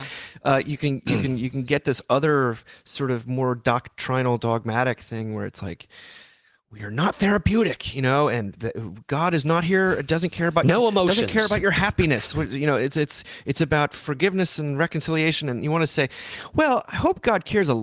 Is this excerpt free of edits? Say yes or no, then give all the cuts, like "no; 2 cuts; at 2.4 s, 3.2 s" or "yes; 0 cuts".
yes; 0 cuts